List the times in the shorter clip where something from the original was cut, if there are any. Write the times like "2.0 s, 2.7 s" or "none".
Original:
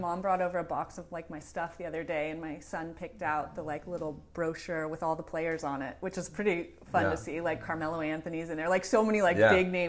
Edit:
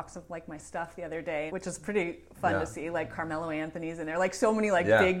1.5 s